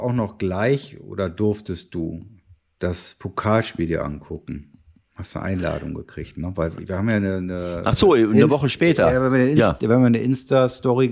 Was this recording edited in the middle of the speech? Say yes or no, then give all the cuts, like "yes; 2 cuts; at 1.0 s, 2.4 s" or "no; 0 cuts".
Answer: no; 0 cuts